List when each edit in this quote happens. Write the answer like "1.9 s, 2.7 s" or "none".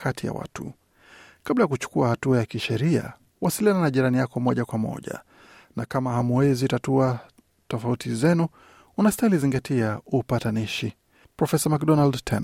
11.2 s